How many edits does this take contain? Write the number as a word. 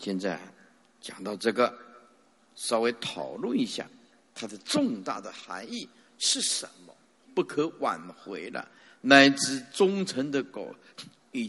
two